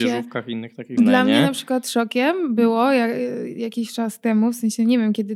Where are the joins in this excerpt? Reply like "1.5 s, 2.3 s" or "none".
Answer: 1.0 s